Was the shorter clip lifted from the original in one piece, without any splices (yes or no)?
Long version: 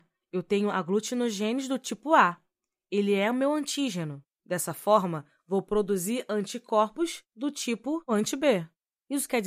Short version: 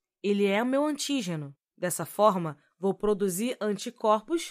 yes